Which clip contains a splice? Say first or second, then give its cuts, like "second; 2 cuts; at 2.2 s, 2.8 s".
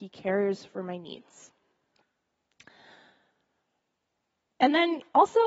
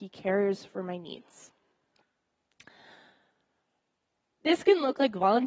second; 1 cut; at 4.3 s